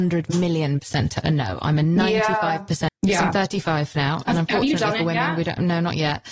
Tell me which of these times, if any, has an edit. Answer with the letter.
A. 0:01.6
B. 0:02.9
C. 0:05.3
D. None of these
B